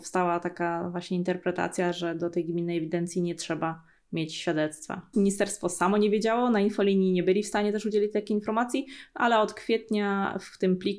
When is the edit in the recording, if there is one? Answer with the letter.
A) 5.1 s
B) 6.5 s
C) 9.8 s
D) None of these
A